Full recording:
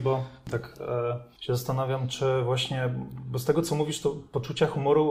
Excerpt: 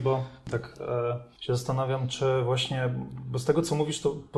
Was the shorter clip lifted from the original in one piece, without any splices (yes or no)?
yes